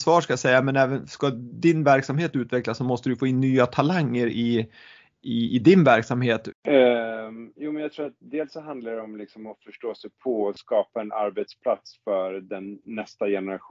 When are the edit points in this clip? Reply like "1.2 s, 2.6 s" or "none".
6.5 s